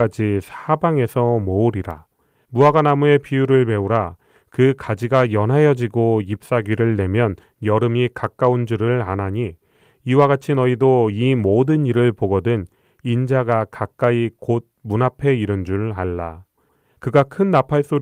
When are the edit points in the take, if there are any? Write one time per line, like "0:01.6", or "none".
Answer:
0:16.9